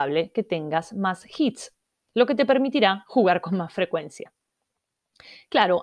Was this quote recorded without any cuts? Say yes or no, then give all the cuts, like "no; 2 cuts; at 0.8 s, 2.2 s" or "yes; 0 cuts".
yes; 0 cuts